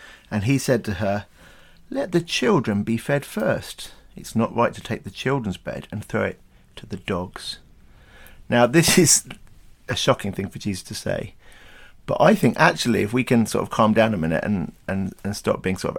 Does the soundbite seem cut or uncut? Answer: uncut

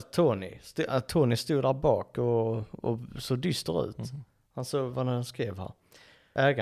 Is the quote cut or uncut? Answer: cut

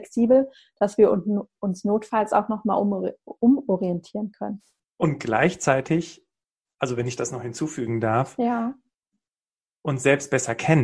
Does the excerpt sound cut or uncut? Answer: cut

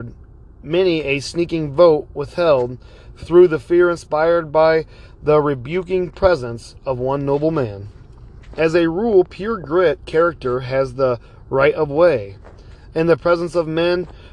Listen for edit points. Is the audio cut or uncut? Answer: uncut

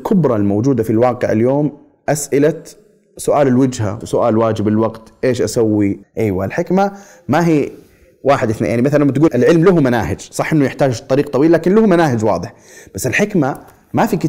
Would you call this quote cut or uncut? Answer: cut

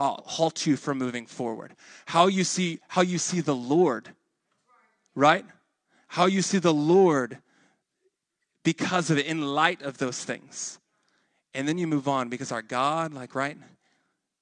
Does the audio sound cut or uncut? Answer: uncut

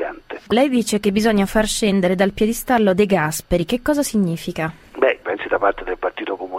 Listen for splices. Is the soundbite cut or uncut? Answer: cut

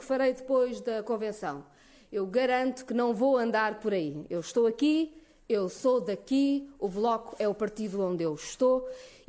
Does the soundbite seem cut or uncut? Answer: uncut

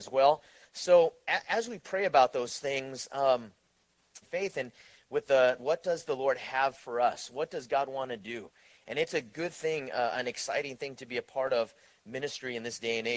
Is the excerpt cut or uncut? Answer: cut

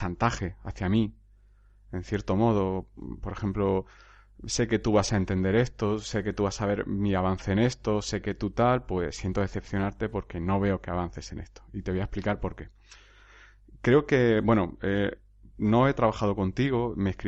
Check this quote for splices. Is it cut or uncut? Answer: uncut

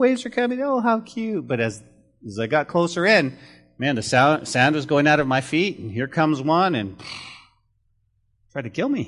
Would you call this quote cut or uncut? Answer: uncut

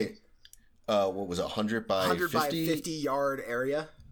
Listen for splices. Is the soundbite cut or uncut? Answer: uncut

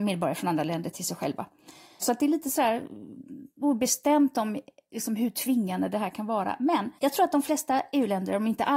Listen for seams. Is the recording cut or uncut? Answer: cut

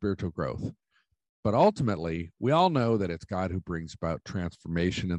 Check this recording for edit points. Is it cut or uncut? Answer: uncut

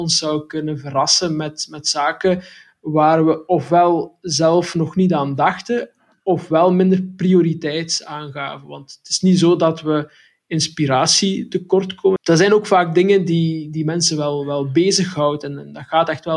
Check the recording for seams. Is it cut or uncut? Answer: cut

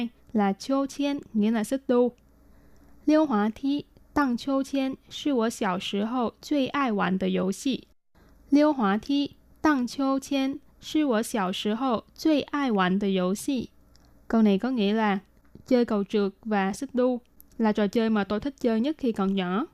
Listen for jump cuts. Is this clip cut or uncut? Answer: uncut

